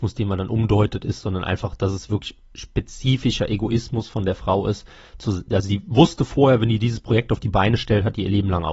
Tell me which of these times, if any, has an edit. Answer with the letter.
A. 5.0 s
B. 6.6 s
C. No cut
C